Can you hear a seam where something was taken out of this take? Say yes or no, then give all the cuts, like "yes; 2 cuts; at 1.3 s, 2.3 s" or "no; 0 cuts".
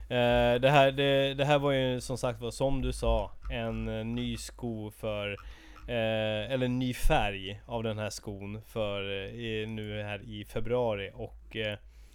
no; 0 cuts